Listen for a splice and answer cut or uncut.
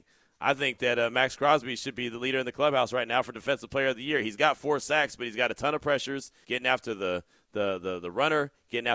cut